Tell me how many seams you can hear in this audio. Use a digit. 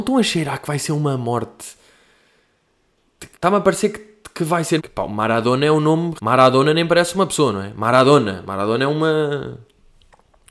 3